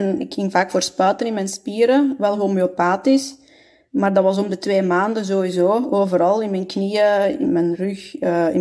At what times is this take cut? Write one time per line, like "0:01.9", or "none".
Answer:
0:07.4